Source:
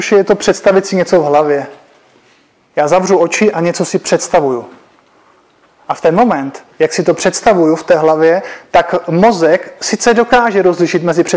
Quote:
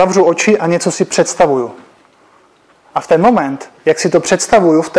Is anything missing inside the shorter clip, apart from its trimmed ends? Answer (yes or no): no